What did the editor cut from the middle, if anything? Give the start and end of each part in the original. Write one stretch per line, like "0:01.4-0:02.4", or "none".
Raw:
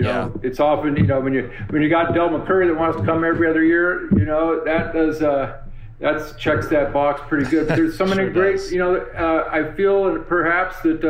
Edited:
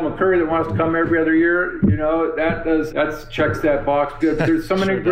0:05.2-0:06.0
0:07.3-0:07.5

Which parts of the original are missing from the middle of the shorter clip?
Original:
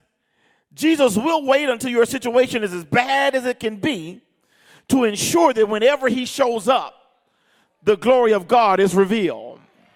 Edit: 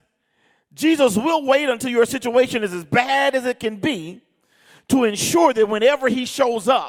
none

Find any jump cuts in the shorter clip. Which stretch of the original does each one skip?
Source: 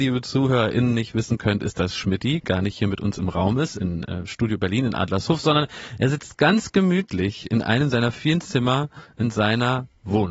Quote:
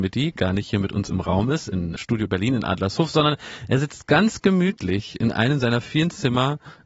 0:04.0-0:04.3

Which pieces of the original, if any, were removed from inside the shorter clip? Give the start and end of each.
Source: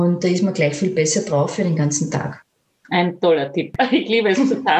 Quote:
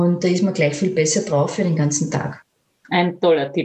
none

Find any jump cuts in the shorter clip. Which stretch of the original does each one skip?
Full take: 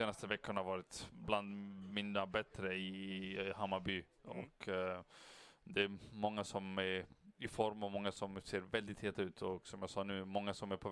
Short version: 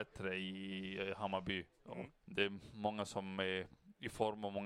0:04.6-0:05.6

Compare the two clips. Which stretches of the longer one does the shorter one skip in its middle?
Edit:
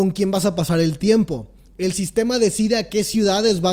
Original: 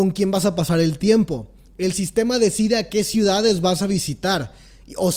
none

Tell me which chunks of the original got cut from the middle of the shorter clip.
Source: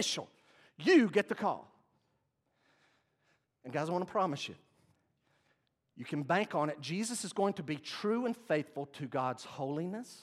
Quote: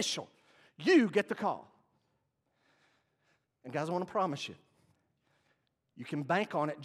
none

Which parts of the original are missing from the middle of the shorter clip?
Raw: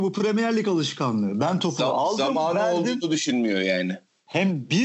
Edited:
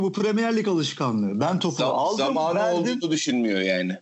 none

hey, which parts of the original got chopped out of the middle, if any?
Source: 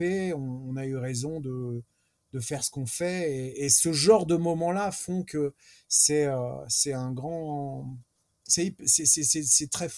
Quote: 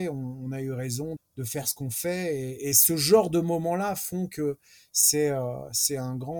0:01.4-0:02.1

